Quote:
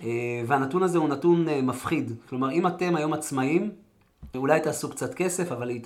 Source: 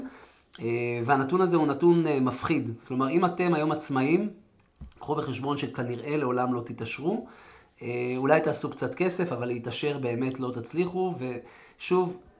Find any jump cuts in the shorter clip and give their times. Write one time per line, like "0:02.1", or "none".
0:04.3